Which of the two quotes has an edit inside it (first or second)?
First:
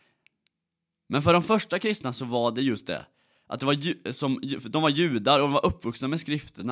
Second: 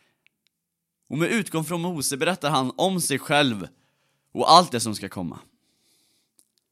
second